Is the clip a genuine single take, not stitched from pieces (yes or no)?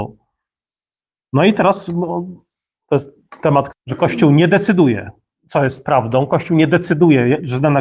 no